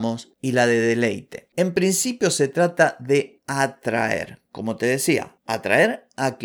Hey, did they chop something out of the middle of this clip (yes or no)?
no